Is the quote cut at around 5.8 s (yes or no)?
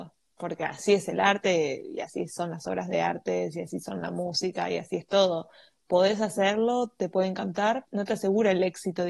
no